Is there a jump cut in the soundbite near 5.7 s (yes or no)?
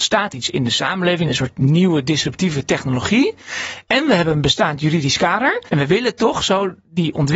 yes